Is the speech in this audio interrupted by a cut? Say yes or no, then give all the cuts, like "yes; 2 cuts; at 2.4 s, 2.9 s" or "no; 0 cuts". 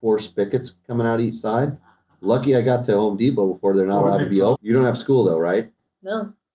yes; 1 cut; at 4.6 s